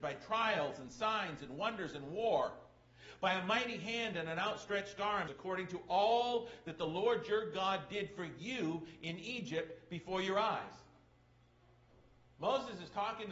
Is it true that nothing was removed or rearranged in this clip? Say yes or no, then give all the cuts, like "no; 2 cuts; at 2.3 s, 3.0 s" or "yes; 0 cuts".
no; 1 cut; at 5.3 s